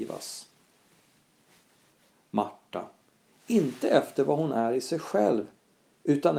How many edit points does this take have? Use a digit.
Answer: 1